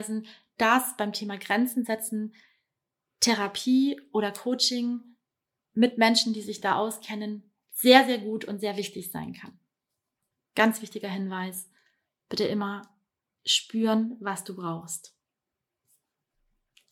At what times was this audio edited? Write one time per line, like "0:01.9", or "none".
none

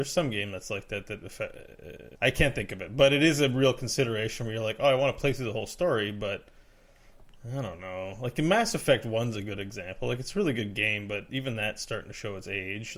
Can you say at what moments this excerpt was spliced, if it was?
0:02.2

